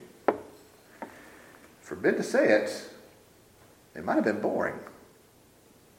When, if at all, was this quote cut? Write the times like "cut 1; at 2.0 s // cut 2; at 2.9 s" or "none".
none